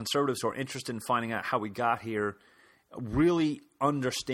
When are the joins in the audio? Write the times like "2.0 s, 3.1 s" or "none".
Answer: none